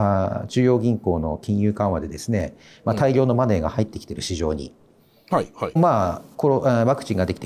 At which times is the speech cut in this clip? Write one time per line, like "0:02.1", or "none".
0:05.8